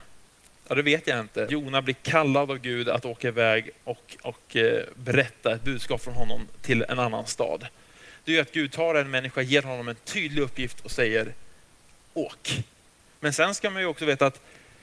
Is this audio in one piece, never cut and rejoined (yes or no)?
no